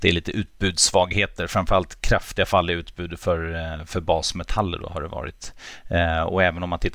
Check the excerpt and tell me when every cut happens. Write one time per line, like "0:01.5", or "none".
none